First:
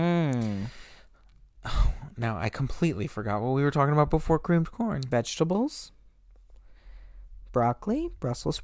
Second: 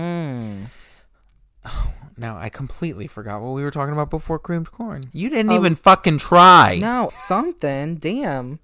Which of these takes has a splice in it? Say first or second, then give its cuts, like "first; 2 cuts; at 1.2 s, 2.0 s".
second; 2 cuts; at 5.1 s, 7.1 s